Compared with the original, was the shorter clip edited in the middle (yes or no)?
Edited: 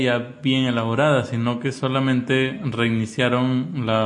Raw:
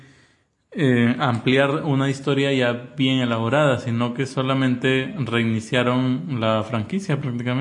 no